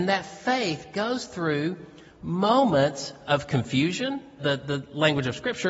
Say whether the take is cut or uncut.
cut